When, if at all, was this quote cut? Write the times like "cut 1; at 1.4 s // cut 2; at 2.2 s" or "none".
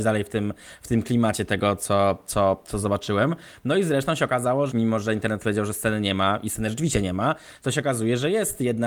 cut 1; at 4.7 s